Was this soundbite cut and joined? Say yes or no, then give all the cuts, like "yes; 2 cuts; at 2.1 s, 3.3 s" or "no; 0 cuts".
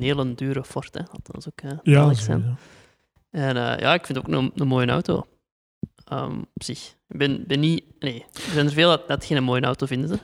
no; 0 cuts